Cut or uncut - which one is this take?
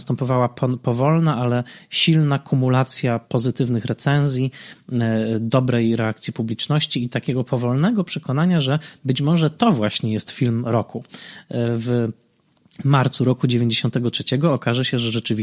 uncut